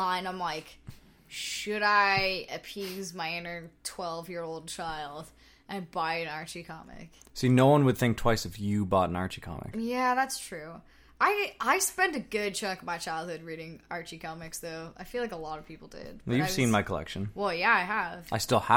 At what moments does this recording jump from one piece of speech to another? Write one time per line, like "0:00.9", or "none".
none